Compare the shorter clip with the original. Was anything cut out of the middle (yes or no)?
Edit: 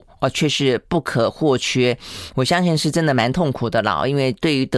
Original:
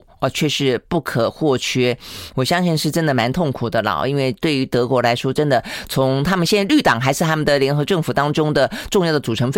no